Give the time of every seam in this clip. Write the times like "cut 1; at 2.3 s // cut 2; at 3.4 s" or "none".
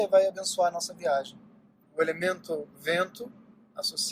cut 1; at 1.8 s